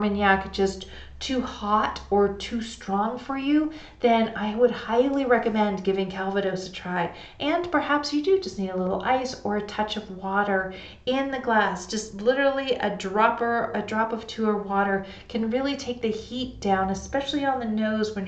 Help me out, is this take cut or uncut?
uncut